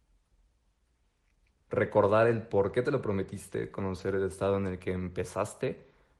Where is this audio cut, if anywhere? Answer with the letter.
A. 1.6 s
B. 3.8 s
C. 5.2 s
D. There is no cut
A